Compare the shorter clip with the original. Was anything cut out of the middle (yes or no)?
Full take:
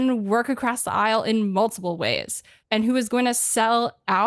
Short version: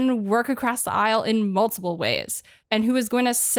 no